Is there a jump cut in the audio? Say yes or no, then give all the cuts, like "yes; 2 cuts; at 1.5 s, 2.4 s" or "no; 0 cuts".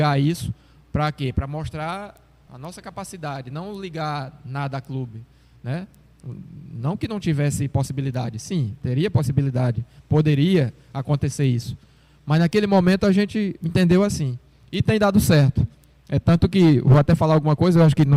yes; 1 cut; at 2.5 s